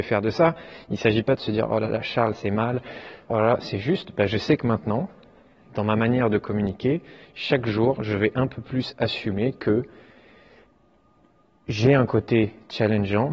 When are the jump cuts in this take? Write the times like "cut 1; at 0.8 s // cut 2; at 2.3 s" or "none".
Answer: cut 1; at 3.3 s